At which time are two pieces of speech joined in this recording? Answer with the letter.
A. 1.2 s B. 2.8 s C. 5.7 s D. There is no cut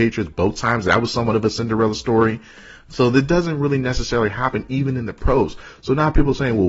D